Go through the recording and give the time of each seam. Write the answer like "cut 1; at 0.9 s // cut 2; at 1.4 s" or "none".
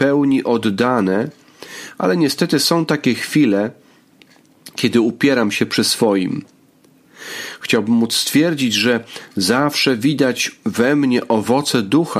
none